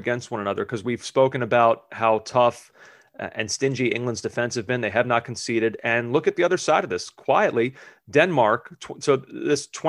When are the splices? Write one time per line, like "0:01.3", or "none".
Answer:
none